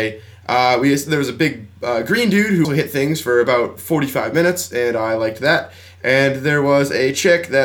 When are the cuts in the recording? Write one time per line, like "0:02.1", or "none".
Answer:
0:02.6